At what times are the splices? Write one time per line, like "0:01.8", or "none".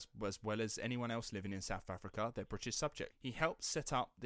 0:03.1